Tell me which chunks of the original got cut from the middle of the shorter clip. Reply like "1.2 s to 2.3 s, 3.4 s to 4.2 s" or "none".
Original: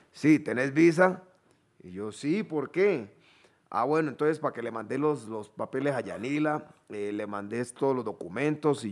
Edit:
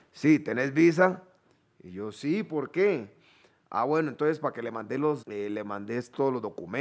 5.2 s to 6.8 s